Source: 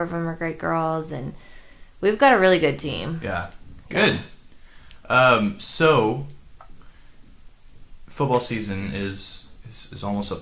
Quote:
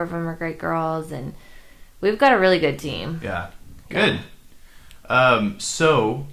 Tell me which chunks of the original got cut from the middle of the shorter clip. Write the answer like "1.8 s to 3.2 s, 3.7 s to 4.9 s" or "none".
none